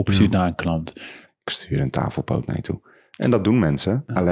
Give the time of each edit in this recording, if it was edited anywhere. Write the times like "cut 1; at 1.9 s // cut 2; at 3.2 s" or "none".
cut 1; at 1.3 s